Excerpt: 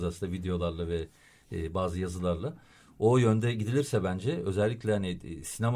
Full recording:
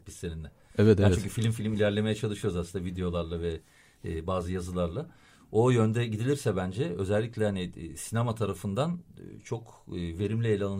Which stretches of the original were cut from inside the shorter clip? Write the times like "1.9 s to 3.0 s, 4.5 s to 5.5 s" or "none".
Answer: none